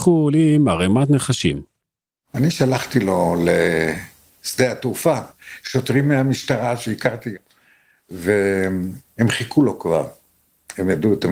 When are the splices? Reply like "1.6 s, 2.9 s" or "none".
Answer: none